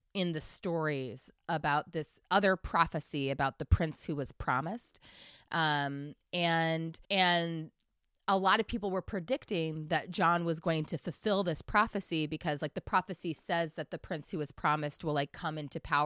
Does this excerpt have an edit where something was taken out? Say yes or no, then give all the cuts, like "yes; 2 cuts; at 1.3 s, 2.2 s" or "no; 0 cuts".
yes; 1 cut; at 7.0 s